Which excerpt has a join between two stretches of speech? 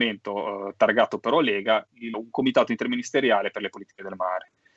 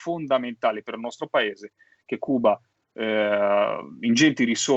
first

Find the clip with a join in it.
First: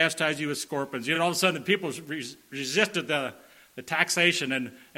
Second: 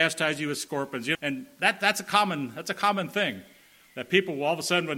second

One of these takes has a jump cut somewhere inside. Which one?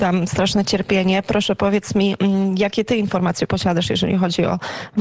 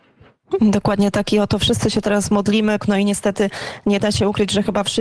second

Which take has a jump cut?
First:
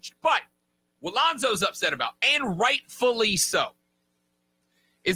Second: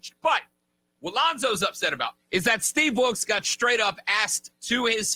second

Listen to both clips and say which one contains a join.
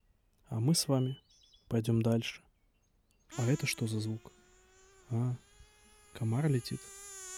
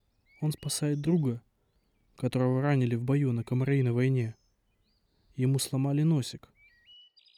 first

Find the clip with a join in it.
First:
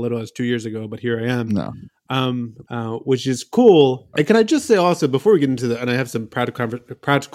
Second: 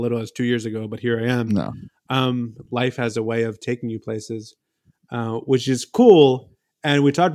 first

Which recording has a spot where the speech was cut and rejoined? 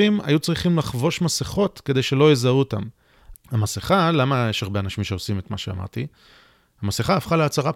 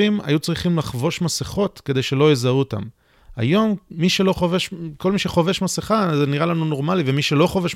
first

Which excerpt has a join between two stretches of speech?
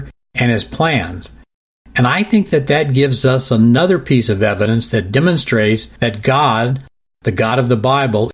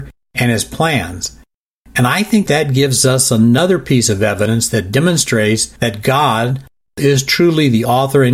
second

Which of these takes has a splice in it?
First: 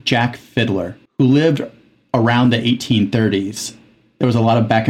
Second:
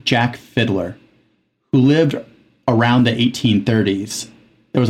first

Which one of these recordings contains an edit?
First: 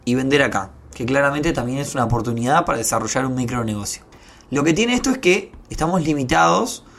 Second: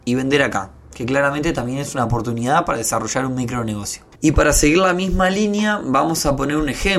second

